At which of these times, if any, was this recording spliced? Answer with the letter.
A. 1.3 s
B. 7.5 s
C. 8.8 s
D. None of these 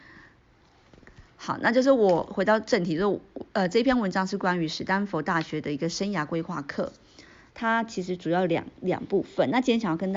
B